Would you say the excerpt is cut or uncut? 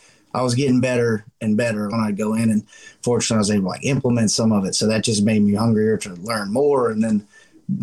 cut